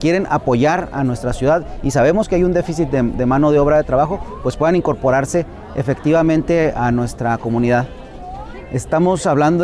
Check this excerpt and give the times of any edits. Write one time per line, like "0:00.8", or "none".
none